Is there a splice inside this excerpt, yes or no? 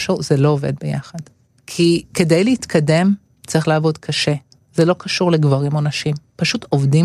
yes